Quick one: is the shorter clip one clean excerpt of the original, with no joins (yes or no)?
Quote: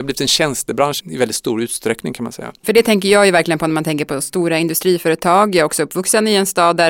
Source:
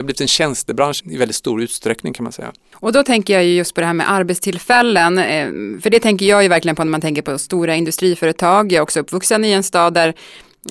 no